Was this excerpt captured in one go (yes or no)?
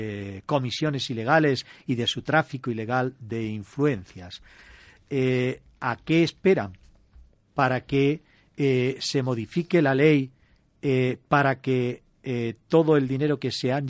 yes